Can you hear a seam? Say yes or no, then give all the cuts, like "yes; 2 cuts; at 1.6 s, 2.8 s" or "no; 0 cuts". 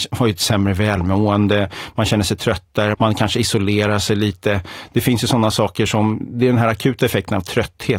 yes; 1 cut; at 2.9 s